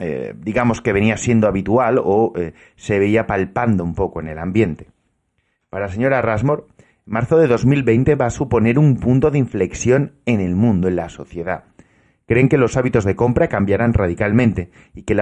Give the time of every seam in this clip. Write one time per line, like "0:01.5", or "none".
none